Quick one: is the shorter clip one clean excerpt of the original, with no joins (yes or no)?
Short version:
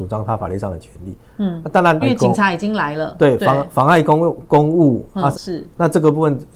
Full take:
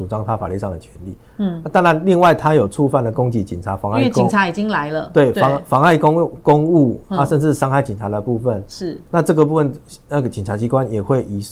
no